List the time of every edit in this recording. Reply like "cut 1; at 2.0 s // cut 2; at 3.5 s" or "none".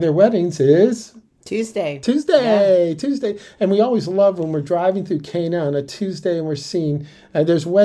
none